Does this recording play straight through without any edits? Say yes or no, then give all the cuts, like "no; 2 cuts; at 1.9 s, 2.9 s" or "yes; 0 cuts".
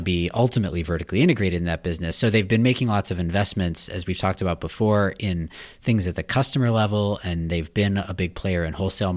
yes; 0 cuts